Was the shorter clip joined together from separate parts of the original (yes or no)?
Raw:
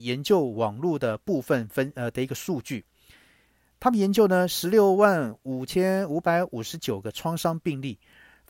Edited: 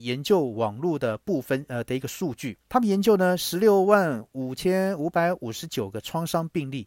yes